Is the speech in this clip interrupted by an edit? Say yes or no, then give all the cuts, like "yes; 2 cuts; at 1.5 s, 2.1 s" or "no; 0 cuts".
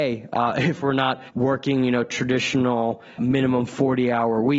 yes; 1 cut; at 3.2 s